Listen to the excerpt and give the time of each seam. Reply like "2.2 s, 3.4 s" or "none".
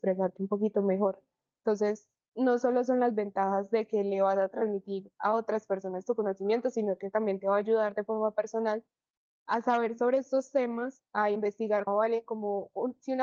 11.9 s